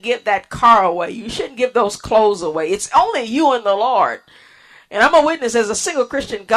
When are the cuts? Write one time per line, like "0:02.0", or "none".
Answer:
none